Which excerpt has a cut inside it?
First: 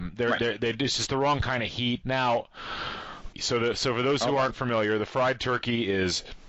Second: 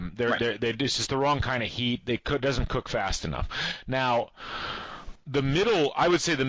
first; 2 cuts; at 2.0 s, 3.3 s

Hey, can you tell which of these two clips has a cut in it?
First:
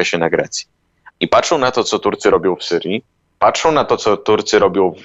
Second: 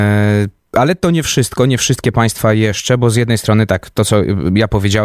first; 1 cut; at 1.1 s

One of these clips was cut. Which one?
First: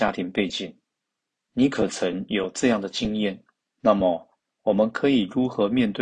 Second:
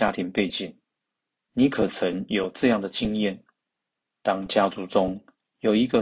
first; 1 cut; at 3.7 s

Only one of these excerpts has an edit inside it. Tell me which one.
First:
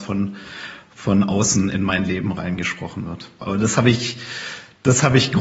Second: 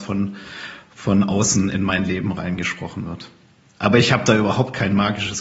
first; 1 cut; at 3.4 s

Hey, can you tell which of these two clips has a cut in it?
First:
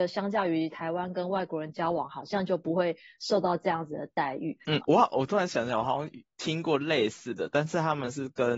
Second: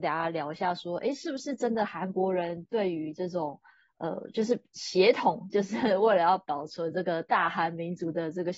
first; 1 cut; at 4.7 s

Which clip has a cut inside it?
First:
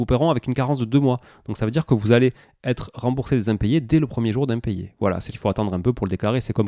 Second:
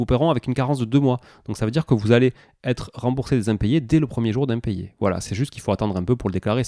first; 1 cut; at 5.3 s

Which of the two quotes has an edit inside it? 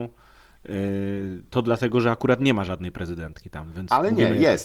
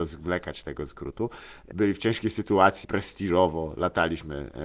second; 2 cuts; at 1.7 s, 2.8 s

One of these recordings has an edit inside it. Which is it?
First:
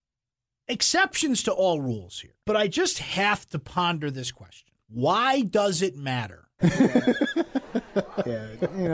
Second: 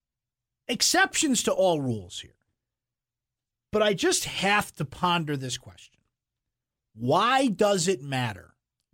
first; 3 cuts; at 2.4 s, 4.8 s, 6.6 s

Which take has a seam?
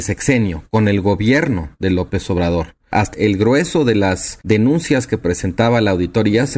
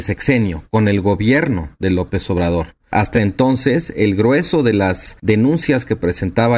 first; 1 cut; at 3.1 s

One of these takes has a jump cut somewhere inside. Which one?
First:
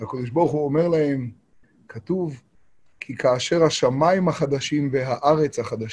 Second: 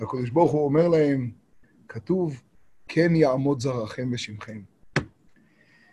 second; 1 cut; at 2.8 s

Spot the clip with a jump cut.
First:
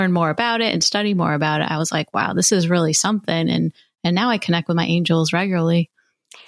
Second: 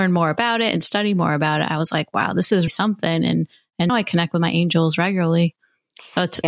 second; 2 cuts; at 2.7 s, 3.9 s

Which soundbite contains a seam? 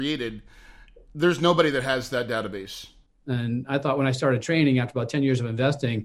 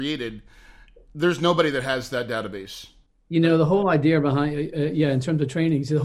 first; 1 cut; at 3.2 s

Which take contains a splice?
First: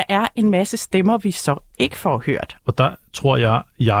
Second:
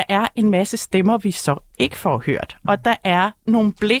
first; 1 cut; at 2.6 s

